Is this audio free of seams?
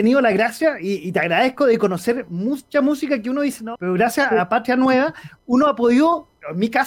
no; 1 cut; at 3.8 s

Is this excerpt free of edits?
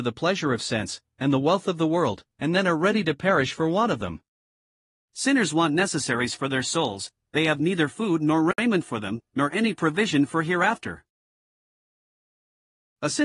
yes; 0 cuts

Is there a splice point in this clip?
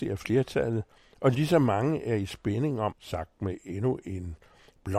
yes; 1 cut; at 2.9 s

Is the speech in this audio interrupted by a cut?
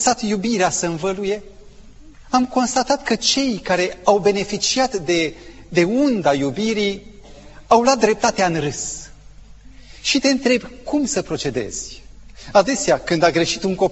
no; 0 cuts

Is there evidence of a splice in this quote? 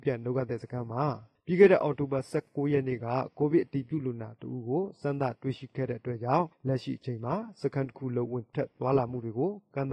no; 0 cuts

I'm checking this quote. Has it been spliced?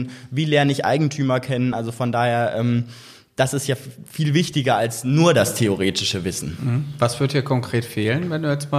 no; 0 cuts

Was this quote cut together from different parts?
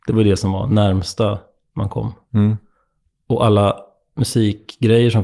no; 0 cuts

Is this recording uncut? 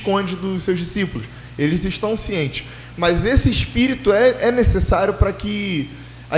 yes; 0 cuts

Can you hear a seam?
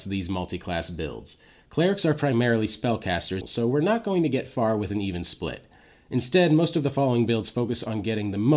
yes; 1 cut; at 3.4 s

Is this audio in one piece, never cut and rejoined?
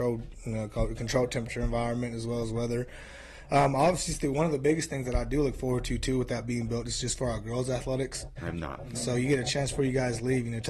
no; 1 cut; at 8.4 s

